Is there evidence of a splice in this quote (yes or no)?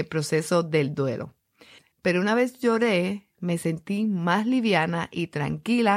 yes